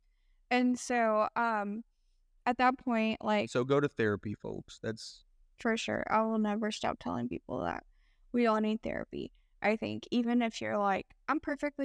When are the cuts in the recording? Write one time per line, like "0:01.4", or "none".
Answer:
none